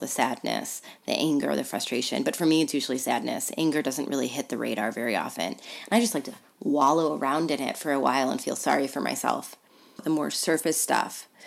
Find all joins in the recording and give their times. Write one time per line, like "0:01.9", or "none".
0:10.0